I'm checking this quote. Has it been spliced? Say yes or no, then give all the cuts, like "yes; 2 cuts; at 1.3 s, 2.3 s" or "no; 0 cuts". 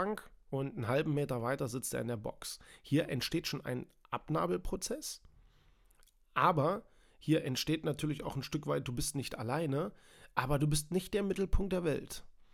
no; 0 cuts